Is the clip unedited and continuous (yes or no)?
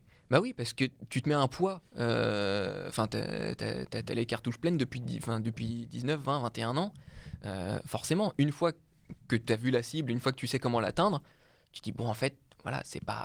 yes